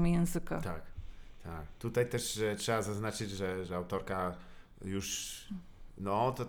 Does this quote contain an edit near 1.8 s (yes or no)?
no